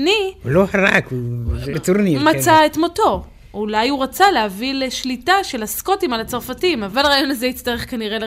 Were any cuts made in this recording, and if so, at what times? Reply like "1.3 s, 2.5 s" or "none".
1.7 s